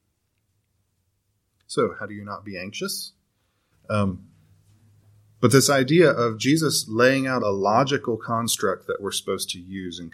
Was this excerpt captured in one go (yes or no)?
no